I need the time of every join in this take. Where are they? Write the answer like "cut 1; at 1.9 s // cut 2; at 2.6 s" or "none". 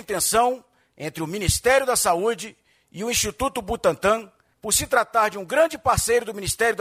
cut 1; at 4.5 s